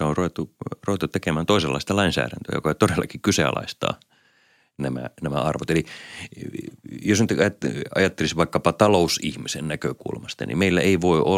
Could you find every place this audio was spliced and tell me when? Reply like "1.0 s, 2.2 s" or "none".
none